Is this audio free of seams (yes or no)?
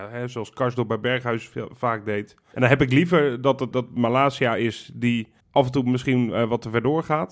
no